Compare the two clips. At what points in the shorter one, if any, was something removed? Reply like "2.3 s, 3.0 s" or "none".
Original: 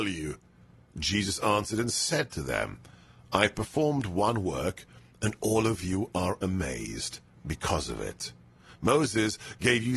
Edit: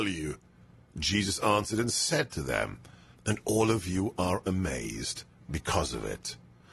3.1 s